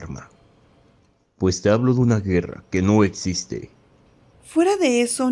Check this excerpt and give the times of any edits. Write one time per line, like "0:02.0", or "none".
0:04.3

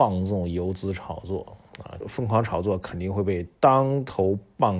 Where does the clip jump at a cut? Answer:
0:02.0

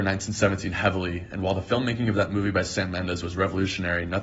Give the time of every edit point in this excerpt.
none

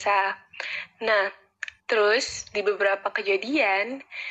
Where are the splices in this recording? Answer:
0:01.8

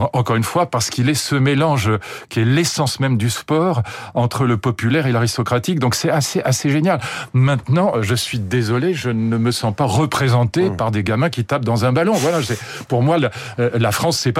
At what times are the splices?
none

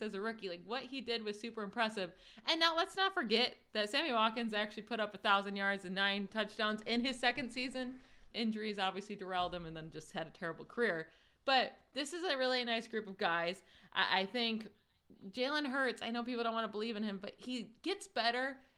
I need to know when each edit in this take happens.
0:08.3

